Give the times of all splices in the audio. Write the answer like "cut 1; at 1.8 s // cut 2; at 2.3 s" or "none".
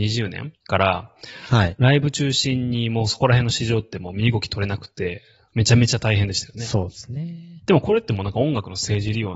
cut 1; at 7.6 s

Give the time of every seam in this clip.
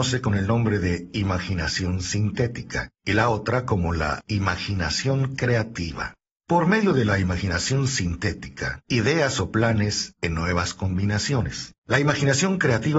cut 1; at 8.8 s // cut 2; at 11.8 s

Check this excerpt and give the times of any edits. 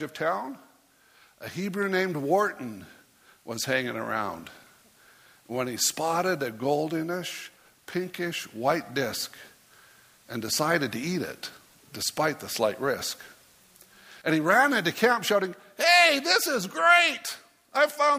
cut 1; at 14.2 s

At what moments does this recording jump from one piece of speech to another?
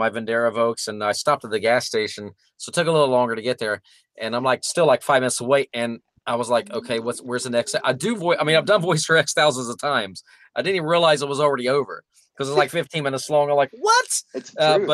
none

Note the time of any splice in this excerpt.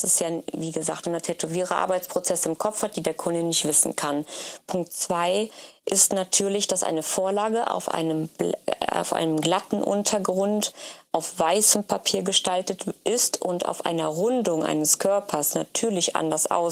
cut 1; at 1.0 s // cut 2; at 4.6 s

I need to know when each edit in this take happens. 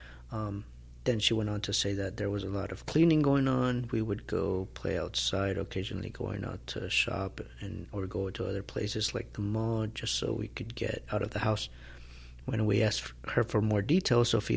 none

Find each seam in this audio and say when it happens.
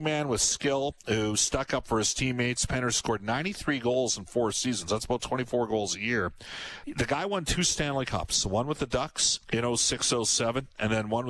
cut 1; at 6.8 s // cut 2; at 9.4 s

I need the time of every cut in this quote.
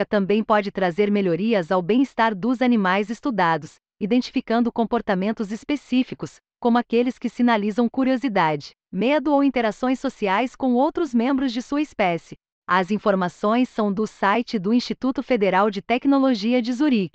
cut 1; at 12.5 s

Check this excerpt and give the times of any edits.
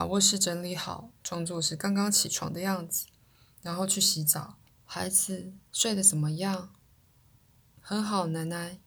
cut 1; at 4.7 s

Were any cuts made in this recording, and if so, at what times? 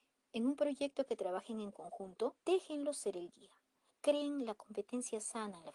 cut 1; at 2.4 s // cut 2; at 3.9 s

